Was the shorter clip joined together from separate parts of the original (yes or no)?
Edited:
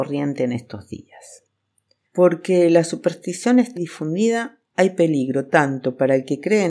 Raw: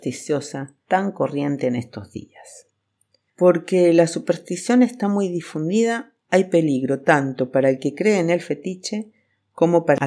yes